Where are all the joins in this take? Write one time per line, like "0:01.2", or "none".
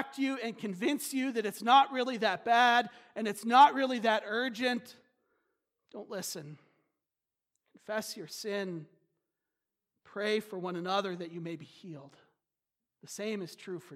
0:12.9